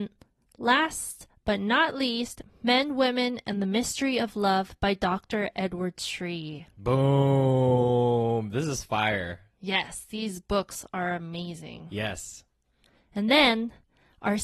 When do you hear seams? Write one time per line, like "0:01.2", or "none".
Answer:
none